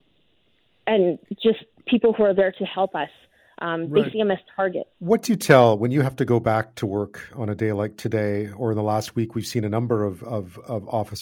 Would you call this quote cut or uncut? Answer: cut